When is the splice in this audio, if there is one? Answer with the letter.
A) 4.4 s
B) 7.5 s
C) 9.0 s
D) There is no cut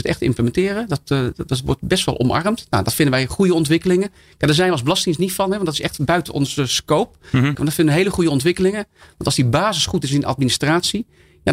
B